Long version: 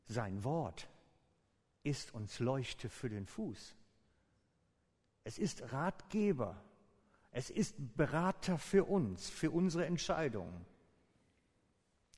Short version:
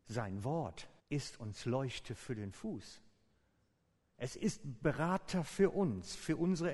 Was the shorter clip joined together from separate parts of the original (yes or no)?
yes